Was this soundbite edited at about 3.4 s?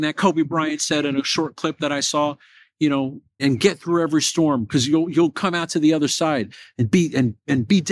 yes; 1 cut; at 3.4 s

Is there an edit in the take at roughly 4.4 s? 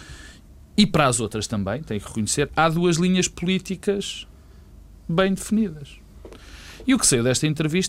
no; 0 cuts

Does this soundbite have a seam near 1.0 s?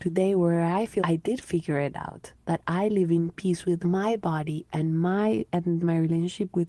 yes; 1 cut; at 1.0 s

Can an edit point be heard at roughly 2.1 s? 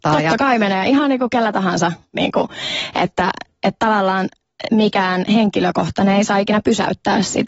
yes; 1 cut; at 2.1 s

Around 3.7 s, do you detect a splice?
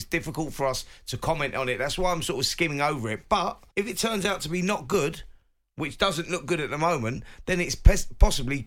yes; 1 cut; at 3.7 s

